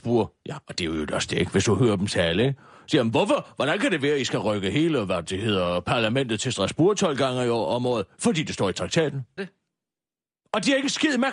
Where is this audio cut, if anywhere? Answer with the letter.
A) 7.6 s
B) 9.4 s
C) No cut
B